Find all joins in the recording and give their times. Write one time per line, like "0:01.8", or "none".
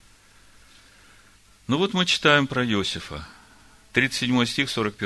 none